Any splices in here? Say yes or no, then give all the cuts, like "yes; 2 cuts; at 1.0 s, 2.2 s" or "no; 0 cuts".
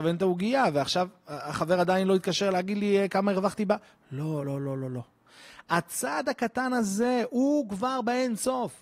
no; 0 cuts